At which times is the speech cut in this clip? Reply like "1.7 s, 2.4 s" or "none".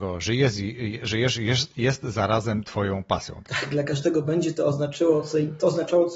3.4 s